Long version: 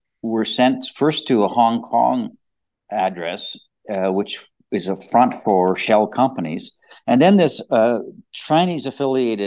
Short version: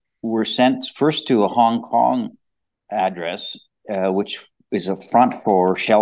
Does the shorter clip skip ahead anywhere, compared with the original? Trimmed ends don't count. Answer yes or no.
no